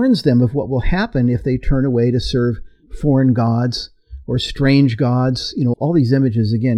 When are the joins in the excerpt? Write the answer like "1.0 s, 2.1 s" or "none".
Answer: 5.7 s